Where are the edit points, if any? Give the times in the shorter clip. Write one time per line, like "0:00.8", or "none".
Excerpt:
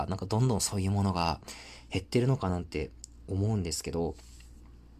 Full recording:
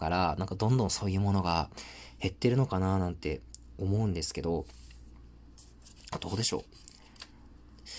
0:02.5